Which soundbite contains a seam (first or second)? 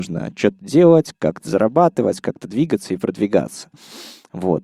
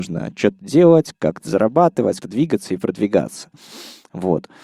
second